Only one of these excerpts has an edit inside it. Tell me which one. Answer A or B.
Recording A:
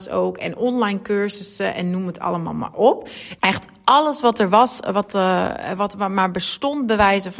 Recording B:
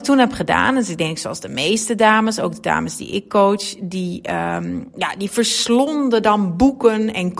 A